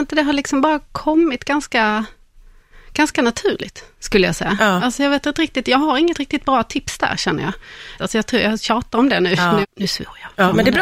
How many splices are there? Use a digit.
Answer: 2